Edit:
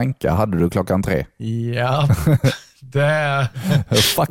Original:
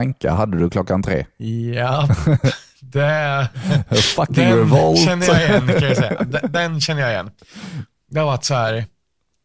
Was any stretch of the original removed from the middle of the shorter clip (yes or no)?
no